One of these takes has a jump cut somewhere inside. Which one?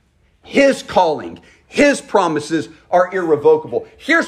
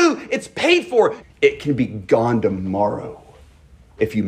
second; 1 cut; at 1.2 s

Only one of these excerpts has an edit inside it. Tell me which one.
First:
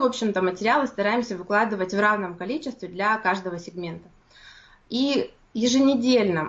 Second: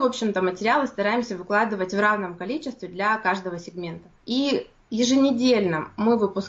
second; 1 cut; at 4.1 s

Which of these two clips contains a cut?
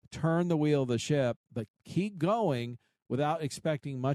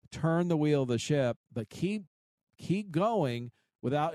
first; 1 cut; at 1.7 s

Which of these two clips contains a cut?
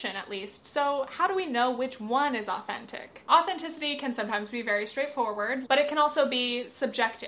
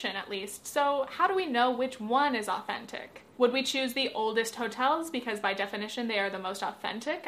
first; 2 cuts; at 3.3 s, 5.6 s

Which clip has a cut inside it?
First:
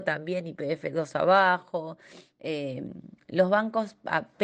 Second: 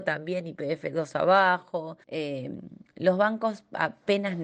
second; 1 cut; at 2.0 s

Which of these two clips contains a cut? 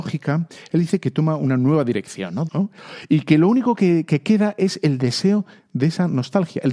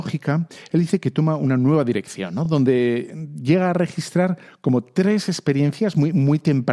first; 1 cut; at 2.5 s

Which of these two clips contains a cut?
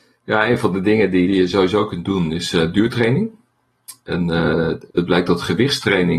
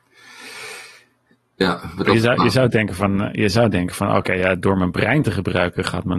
first; 2 cuts; at 1.2 s, 4.9 s

